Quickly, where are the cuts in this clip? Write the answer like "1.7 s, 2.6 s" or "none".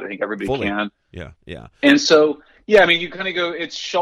1.4 s